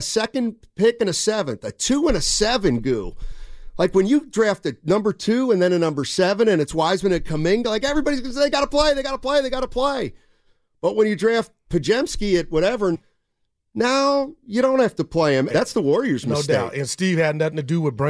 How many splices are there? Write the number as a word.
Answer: two